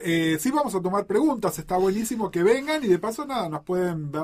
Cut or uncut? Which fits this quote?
uncut